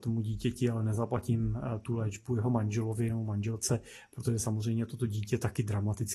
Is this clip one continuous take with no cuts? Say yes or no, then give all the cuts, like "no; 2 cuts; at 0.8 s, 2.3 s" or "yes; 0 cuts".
yes; 0 cuts